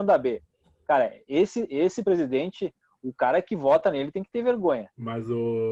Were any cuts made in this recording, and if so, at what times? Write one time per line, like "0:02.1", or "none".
none